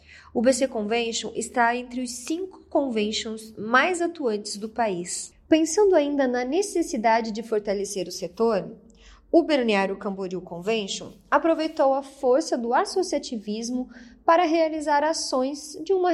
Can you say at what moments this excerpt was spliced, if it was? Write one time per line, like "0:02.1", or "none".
none